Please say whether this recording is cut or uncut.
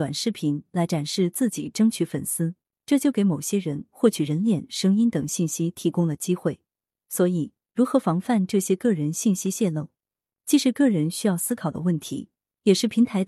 uncut